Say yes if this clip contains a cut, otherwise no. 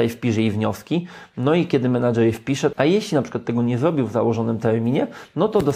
yes